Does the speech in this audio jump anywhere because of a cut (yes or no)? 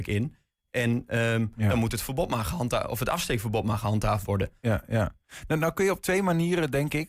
no